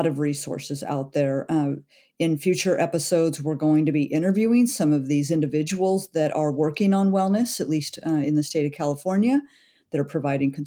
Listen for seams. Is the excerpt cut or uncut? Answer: uncut